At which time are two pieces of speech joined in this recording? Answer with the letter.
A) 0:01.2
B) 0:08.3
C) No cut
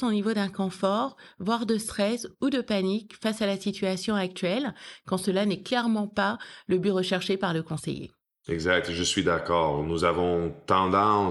C